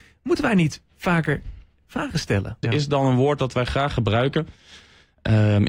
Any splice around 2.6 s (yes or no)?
yes